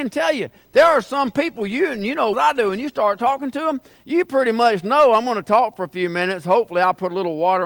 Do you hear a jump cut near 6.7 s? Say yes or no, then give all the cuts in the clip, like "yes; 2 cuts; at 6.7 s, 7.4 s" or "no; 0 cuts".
no; 1 cut; at 2.3 s